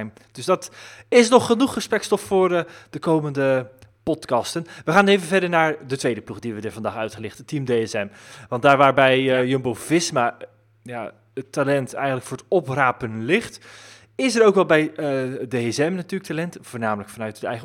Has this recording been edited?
no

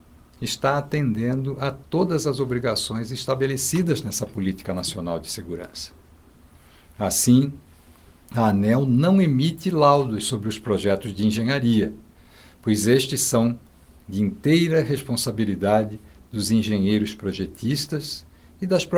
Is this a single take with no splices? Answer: yes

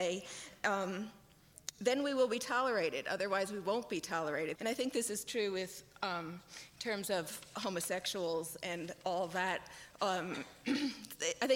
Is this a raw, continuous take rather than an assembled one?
no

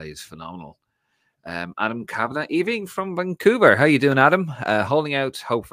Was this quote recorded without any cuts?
yes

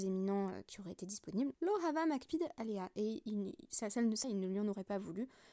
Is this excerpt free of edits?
no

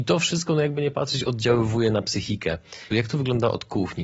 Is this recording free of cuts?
no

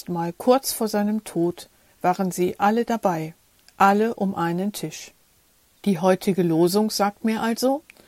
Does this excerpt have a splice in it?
yes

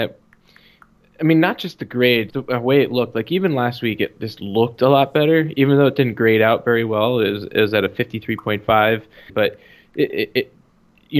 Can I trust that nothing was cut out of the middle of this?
no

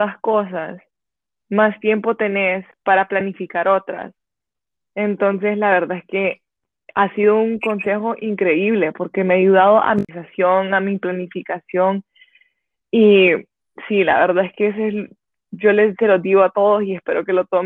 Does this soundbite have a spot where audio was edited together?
no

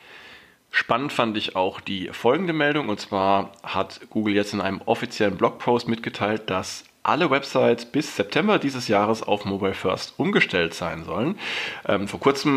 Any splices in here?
no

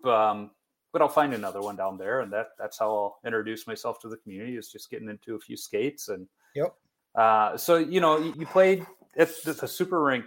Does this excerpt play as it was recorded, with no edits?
no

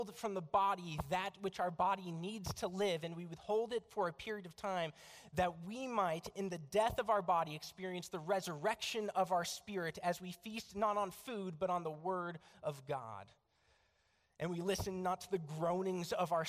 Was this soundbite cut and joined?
no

